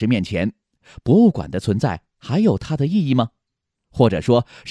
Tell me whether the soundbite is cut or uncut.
uncut